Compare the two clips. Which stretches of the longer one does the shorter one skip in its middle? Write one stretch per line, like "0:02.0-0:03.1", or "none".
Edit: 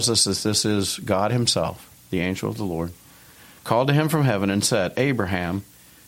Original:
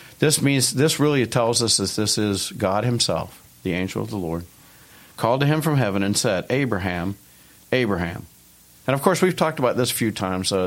none